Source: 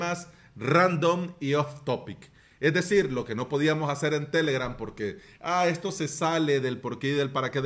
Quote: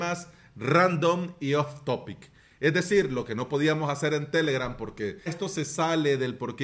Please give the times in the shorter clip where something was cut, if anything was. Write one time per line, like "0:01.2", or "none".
0:05.3